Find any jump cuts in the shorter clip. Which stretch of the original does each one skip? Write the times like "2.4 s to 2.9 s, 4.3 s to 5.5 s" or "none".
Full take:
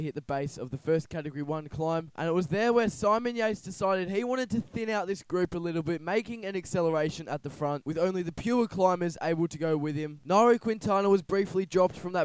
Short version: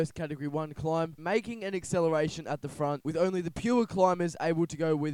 2.1 s to 6.0 s